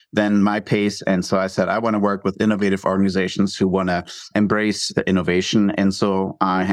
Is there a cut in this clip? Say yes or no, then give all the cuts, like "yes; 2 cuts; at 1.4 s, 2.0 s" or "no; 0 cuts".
yes; 1 cut; at 4.3 s